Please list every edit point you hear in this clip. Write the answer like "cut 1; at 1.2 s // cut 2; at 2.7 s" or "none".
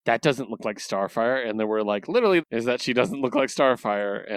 cut 1; at 2.4 s